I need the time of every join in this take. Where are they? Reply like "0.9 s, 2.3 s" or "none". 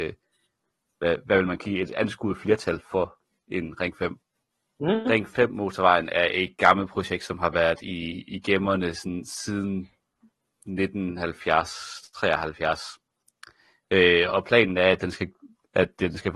4.8 s